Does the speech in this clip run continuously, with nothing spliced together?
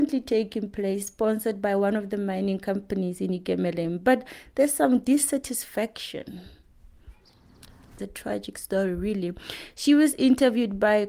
no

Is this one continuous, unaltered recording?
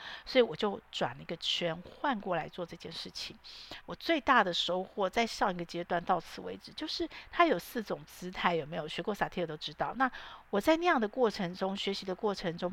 no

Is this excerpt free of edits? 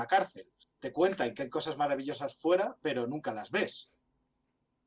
yes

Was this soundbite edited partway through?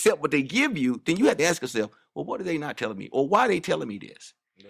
yes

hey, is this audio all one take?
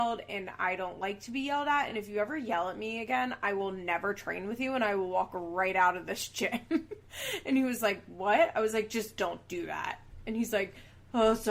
yes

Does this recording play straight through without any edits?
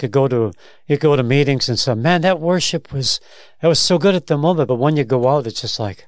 yes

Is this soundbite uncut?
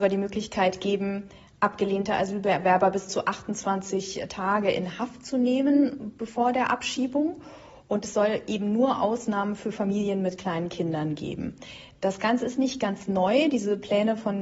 yes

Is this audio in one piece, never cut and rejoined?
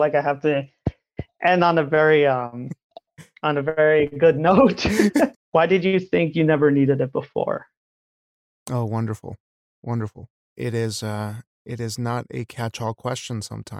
no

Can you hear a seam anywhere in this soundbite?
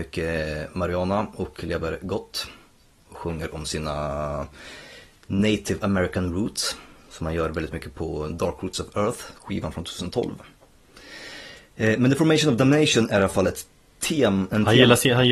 no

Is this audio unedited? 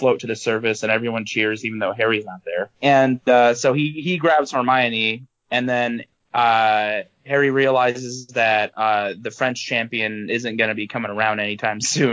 no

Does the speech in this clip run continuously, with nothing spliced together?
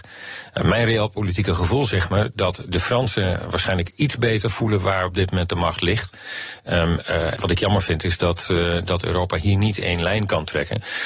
no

